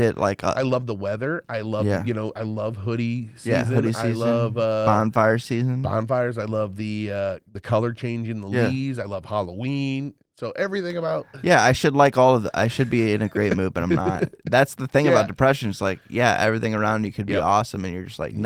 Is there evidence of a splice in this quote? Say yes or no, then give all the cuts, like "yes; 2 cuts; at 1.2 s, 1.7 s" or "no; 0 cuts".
no; 0 cuts